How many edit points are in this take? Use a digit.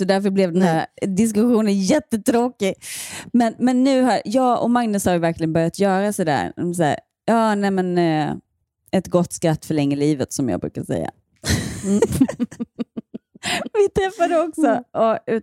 0